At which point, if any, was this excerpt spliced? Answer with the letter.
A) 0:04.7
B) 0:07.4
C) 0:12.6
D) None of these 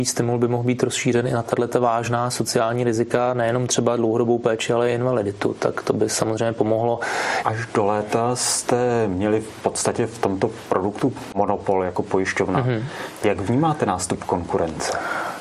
B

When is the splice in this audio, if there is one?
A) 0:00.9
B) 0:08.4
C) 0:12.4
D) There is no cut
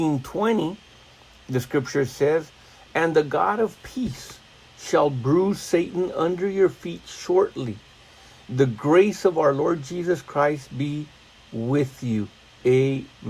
D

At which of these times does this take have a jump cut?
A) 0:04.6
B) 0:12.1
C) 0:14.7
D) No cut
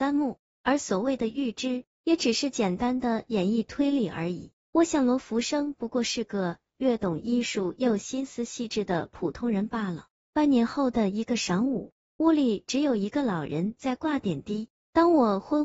B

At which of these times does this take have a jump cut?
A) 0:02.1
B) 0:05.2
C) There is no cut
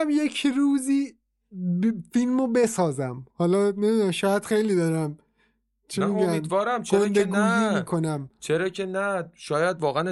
C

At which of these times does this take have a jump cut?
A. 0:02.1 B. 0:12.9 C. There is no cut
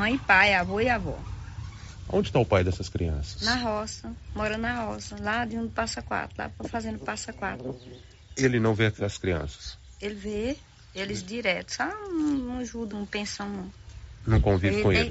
B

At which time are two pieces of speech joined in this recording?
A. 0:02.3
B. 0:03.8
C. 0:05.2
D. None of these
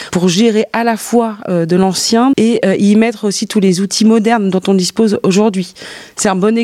A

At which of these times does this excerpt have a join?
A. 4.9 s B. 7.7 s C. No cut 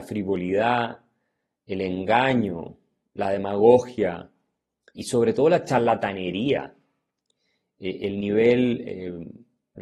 A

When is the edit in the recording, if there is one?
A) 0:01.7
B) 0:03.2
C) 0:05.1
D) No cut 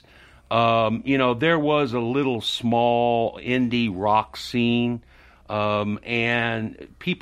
D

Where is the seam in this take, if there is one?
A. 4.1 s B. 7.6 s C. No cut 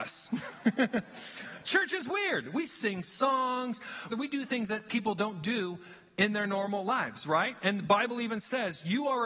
A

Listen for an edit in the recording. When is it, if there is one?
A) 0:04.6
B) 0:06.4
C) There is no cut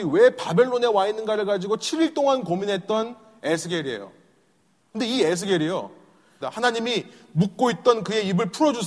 B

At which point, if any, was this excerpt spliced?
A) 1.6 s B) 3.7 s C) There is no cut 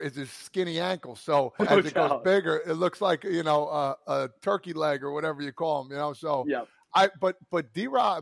A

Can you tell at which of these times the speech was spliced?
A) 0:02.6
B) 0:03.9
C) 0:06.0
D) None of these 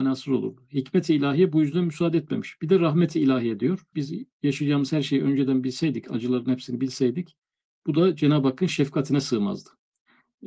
B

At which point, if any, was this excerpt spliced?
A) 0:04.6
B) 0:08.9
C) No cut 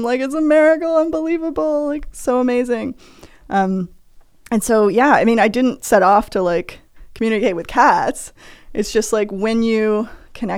C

